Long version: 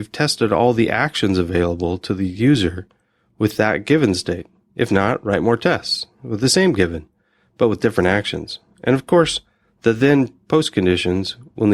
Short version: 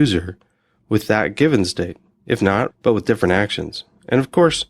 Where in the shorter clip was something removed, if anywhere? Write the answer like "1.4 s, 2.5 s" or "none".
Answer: 2.7 s